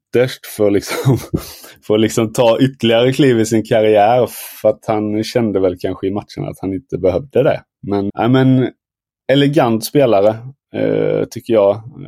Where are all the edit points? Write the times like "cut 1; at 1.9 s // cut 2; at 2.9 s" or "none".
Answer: cut 1; at 8.1 s